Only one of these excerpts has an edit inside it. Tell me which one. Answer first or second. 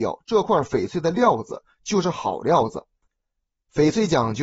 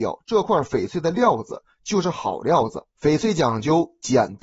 second